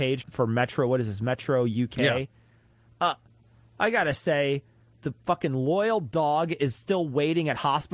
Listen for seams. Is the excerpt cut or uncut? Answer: uncut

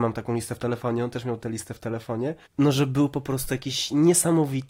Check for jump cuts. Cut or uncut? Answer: cut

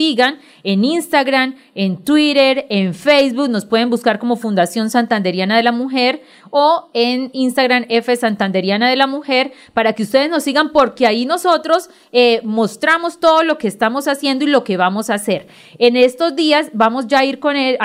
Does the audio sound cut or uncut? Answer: uncut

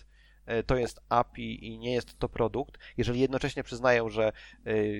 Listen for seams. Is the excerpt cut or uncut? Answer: uncut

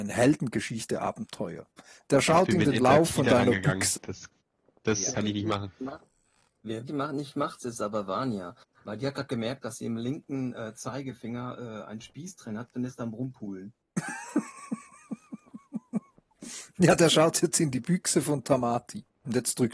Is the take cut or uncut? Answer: cut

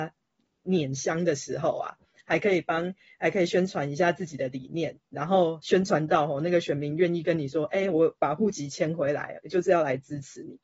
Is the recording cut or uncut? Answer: uncut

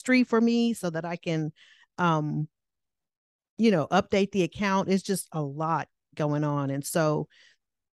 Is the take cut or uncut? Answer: uncut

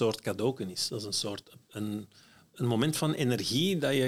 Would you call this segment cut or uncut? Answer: cut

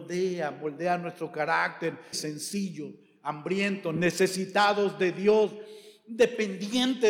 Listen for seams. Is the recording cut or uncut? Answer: cut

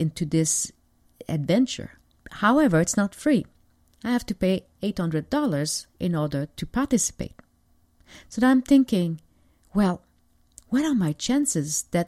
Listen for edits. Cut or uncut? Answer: uncut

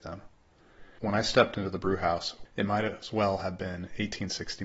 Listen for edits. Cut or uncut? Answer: cut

